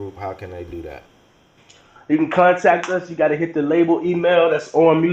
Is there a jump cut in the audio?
no; 0 cuts

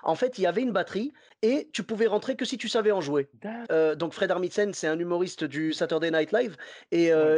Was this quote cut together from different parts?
yes; 1 cut; at 3.7 s

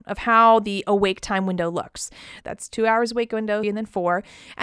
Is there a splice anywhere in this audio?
yes; 2 cuts; at 2.4 s, 3.6 s

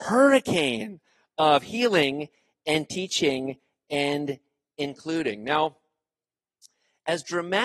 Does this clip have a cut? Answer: no; 0 cuts

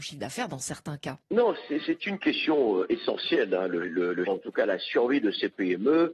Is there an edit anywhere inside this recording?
yes; 2 cuts; at 1.2 s, 4.3 s

